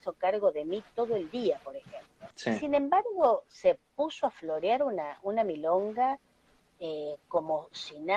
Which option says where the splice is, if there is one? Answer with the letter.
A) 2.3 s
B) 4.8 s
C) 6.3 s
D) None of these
A